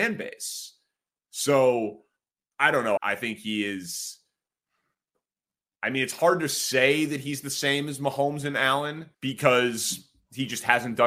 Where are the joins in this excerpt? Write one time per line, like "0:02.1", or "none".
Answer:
0:03.0
0:09.1